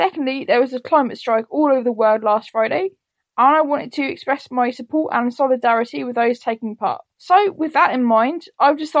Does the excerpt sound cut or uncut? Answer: cut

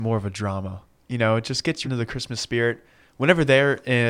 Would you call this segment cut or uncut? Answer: cut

